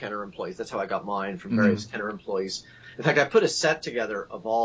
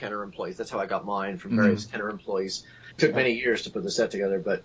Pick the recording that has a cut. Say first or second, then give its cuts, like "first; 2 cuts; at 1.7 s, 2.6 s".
second; 1 cut; at 2.9 s